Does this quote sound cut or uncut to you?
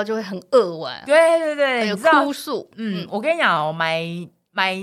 uncut